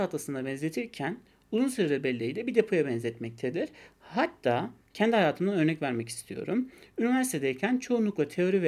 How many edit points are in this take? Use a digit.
1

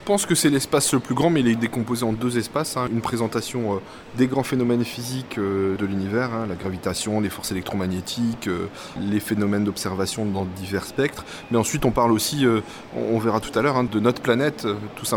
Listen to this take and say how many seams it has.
0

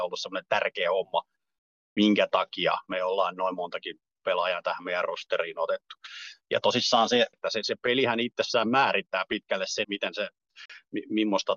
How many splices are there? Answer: 2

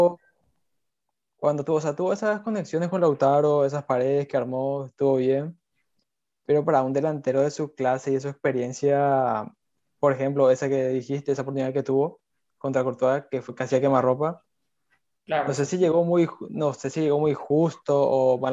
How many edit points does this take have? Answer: 0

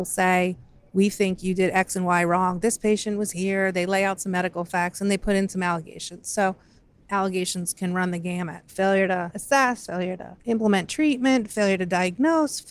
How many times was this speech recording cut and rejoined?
0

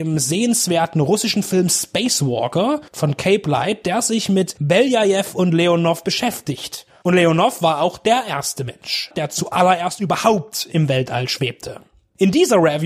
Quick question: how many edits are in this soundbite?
2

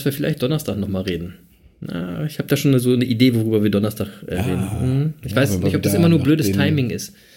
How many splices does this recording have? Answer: 0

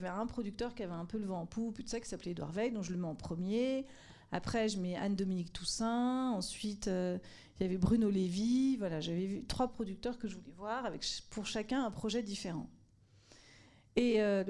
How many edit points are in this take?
0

